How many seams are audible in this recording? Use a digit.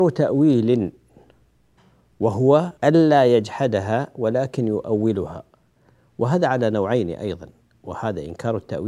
1